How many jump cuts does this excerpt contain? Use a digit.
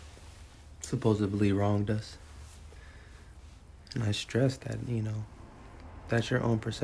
0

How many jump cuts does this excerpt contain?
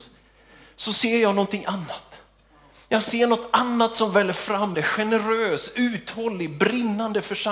1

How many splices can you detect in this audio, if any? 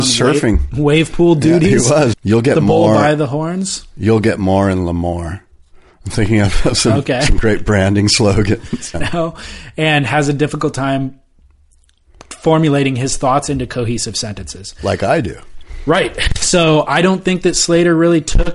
2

